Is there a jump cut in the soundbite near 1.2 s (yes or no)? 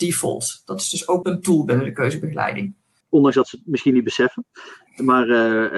yes